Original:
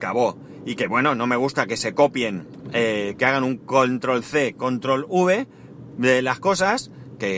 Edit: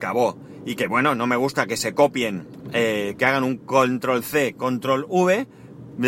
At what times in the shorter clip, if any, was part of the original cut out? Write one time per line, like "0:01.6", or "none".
none